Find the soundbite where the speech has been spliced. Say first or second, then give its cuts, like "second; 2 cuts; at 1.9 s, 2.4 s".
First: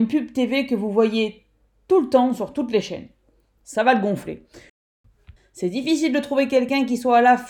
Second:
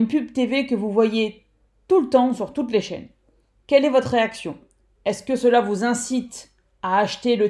first; 2 cuts; at 3.6 s, 5.4 s